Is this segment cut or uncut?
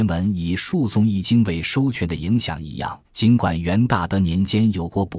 cut